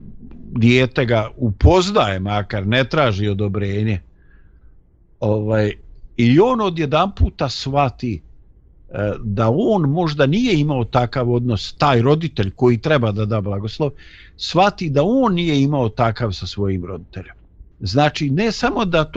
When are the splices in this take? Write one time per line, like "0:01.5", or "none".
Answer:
0:17.7

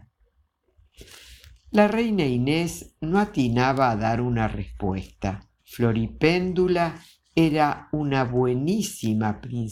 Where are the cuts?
0:05.6

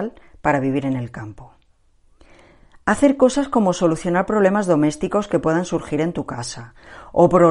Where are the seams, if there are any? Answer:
none

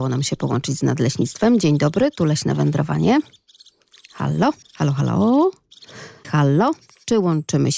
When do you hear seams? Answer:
0:04.6
0:06.2

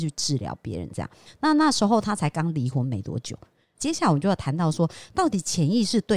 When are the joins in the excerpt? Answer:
0:01.3
0:03.7

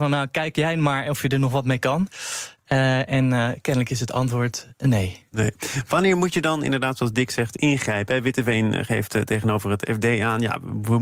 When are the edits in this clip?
none

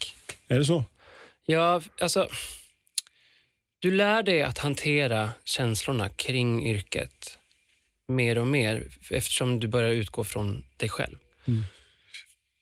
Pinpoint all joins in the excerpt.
none

